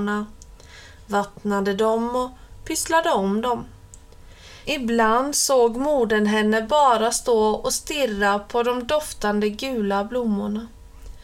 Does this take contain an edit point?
yes; 1 cut; at 4.7 s

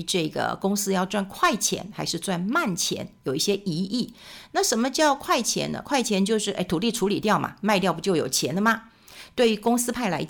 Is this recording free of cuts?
yes; 0 cuts

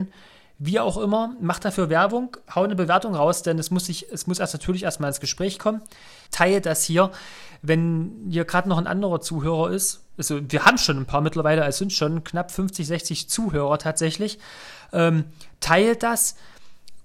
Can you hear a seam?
yes; 1 cut; at 6.3 s

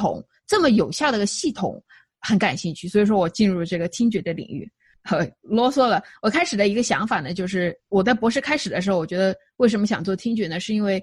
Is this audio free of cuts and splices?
no; 1 cut; at 4.9 s

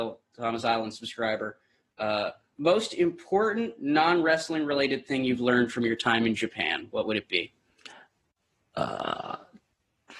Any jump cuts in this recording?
no; 0 cuts

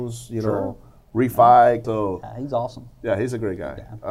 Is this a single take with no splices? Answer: no; 1 cut; at 1.8 s

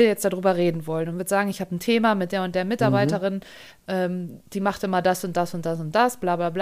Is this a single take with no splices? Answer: yes; 0 cuts

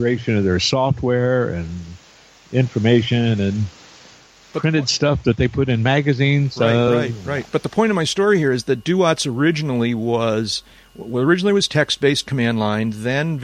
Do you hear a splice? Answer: no; 0 cuts

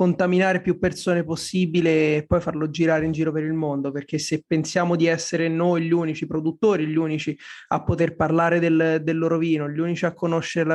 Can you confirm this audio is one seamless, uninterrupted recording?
yes; 0 cuts

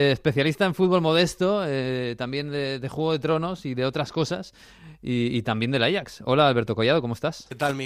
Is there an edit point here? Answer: no; 0 cuts

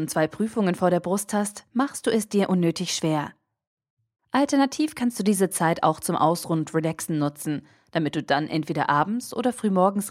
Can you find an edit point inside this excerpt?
yes; 1 cut; at 4.2 s

